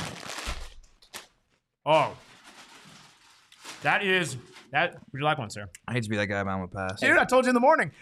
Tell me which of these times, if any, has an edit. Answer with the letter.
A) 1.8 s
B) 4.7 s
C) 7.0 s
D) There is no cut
C